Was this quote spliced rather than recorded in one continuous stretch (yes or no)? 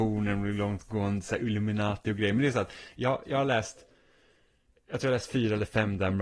no